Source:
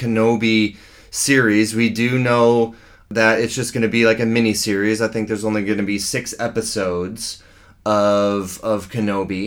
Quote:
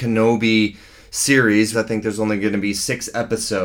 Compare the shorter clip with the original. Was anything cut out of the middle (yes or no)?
yes